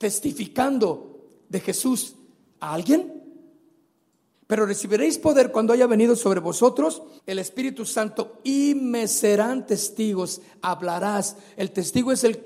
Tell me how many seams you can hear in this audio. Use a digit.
2